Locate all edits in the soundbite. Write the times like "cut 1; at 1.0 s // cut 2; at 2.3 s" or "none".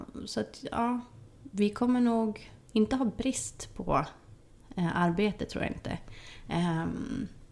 cut 1; at 2.6 s